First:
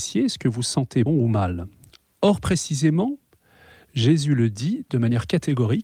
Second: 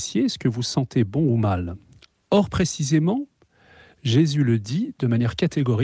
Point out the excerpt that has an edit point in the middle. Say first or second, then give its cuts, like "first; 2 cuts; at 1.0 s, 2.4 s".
first; 1 cut; at 1.1 s